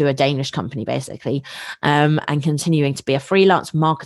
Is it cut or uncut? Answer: uncut